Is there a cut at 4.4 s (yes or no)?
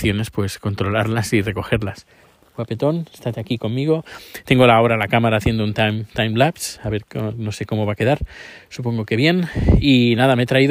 no